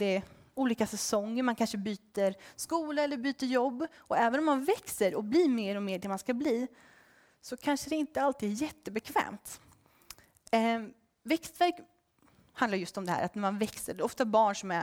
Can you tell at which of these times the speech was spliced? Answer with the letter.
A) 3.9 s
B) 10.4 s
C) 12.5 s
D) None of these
D